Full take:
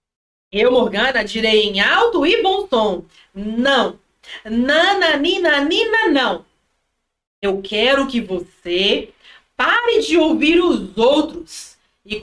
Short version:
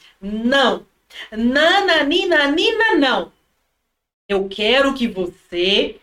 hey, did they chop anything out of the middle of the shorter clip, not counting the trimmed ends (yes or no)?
no